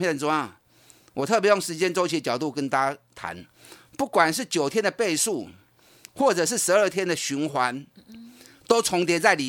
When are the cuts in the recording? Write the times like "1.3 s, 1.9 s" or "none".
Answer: none